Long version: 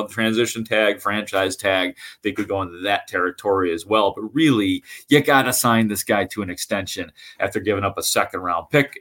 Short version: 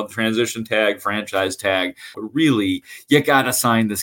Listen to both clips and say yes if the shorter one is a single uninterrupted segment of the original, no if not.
no